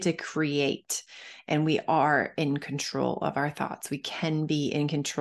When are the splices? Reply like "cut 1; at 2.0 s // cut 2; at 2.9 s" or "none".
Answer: none